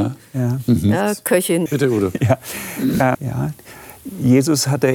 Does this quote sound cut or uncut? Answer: cut